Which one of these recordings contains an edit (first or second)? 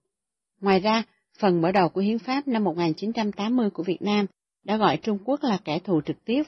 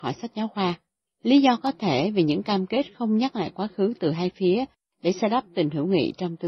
second